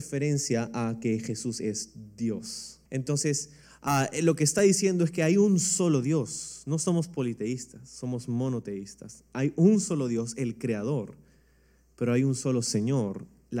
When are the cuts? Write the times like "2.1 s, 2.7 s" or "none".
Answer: 2.9 s